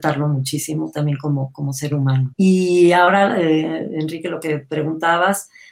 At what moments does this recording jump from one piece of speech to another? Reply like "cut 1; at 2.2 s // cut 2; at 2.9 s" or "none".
cut 1; at 2.3 s